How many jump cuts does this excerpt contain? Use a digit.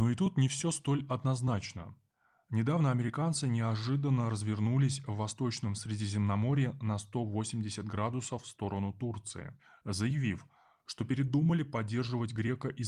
0